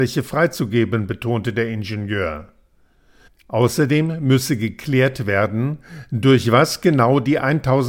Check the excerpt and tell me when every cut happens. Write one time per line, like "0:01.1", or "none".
none